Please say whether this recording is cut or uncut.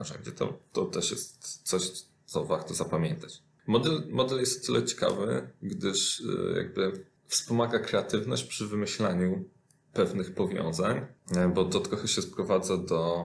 uncut